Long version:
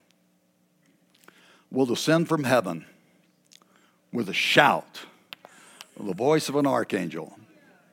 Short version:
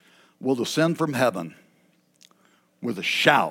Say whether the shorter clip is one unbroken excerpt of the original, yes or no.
yes